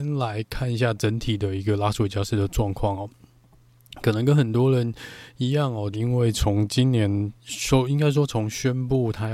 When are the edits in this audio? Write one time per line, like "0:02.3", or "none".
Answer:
0:05.9
0:07.4